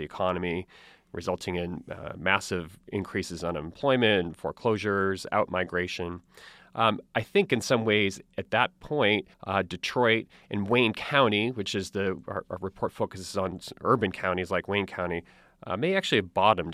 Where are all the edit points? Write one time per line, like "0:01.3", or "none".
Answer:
0:09.3